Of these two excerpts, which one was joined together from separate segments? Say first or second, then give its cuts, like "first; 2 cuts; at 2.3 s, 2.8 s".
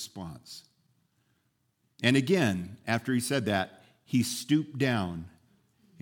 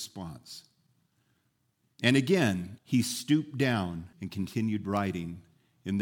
second; 2 cuts; at 2.8 s, 4.1 s